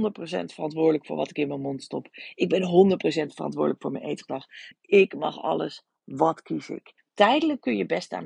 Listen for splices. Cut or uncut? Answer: cut